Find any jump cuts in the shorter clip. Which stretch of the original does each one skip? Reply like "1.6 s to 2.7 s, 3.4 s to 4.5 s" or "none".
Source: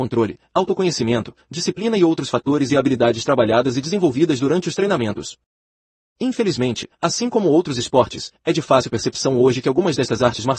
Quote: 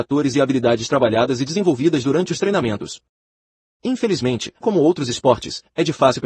7.0 s to 7.3 s

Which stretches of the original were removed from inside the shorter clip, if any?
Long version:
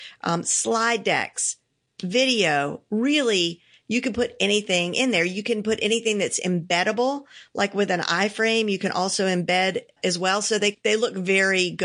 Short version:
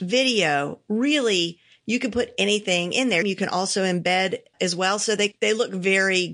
5.2 s to 8.6 s

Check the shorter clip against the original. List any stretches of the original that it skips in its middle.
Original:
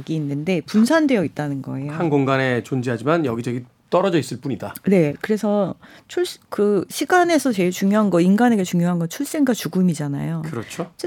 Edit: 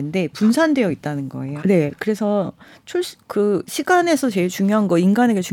1.9 s to 4.8 s

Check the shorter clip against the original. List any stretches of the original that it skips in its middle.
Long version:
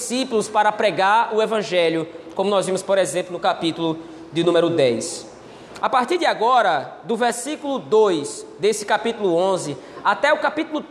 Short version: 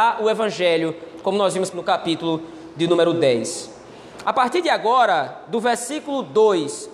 2.8 s to 3.3 s

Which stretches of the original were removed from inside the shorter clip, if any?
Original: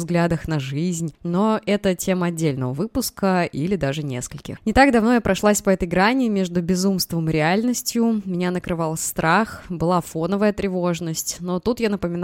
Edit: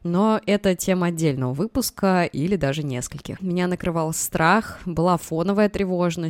4.6 s to 8.2 s

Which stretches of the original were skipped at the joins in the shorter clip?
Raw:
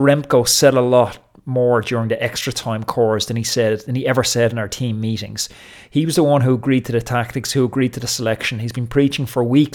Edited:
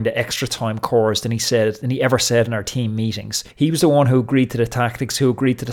5.5 s to 5.8 s

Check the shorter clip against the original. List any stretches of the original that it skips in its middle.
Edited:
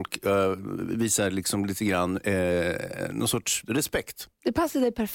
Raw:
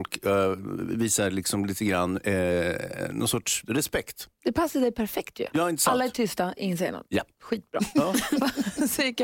none

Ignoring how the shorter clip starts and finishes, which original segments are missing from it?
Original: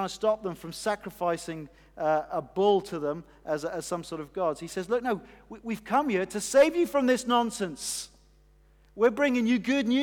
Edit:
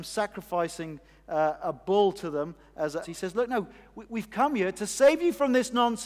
3.7 s to 4.6 s

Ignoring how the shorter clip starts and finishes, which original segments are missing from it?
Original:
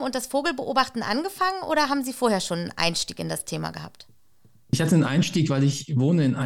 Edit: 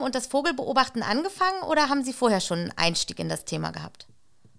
none

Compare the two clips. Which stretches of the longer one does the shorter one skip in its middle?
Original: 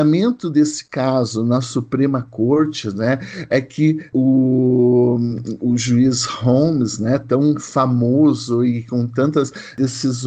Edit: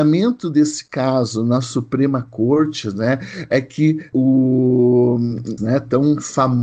5.6 s to 7.0 s

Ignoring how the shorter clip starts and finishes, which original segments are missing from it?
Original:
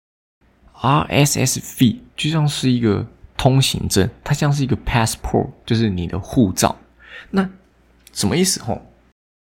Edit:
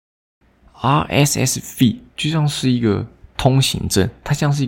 none

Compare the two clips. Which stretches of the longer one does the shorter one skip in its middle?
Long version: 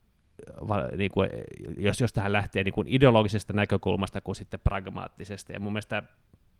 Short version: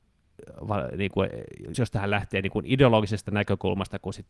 1.7 s to 2.0 s

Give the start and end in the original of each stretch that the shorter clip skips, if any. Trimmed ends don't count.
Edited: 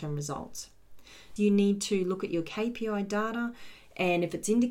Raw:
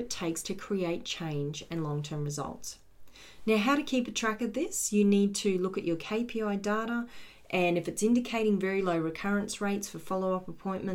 3.4 s to 4.9 s

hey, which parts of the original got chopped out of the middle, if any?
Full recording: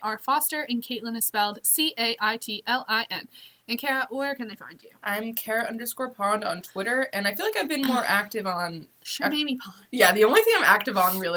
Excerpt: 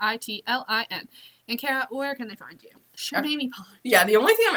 5.0 s to 8.8 s

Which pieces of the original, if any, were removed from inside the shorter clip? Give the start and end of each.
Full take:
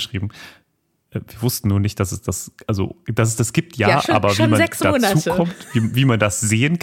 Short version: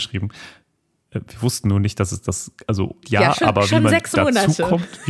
3.0 s to 3.7 s

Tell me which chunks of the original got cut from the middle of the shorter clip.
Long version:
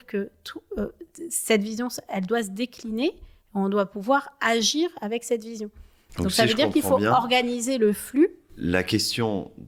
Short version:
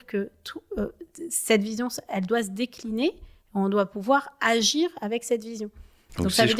none

